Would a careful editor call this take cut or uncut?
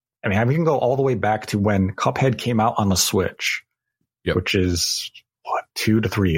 uncut